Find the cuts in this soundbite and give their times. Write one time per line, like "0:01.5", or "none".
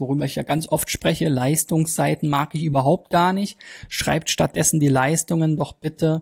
none